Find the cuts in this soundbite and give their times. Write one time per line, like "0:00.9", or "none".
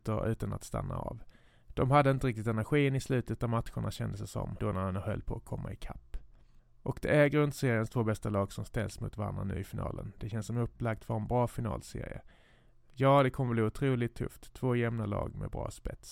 0:04.6